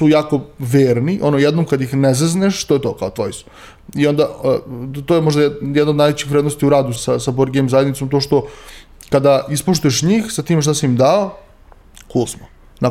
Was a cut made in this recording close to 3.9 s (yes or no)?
no